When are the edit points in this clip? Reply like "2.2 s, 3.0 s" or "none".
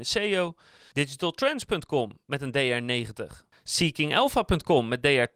0.9 s